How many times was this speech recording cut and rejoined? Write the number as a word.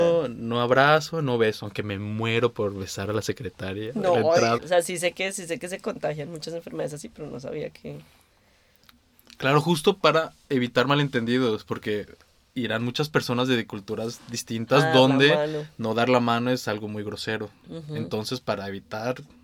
one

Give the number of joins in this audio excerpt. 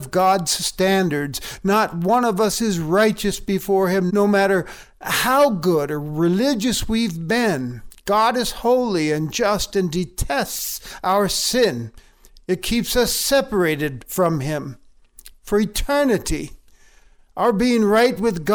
one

